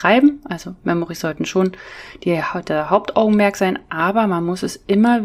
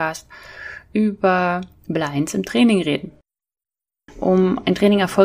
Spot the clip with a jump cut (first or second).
second